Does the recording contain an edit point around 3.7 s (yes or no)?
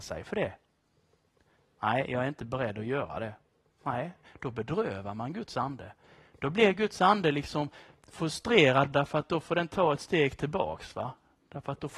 no